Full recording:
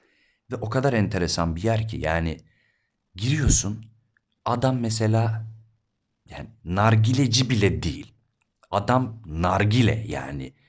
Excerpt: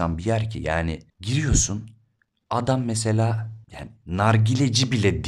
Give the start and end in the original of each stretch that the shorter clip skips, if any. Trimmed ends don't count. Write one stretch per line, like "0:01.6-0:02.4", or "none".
0:02.5-0:03.0
0:05.6-0:06.2